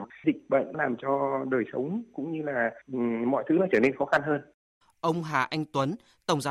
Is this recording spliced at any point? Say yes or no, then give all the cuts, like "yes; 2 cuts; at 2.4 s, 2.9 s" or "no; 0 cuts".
yes; 1 cut; at 4.8 s